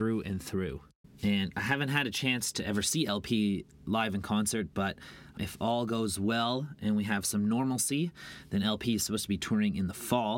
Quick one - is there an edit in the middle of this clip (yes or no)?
no